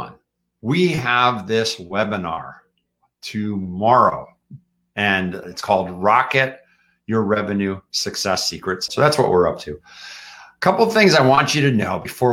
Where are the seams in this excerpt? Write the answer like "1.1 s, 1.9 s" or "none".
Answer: 5.4 s, 8.9 s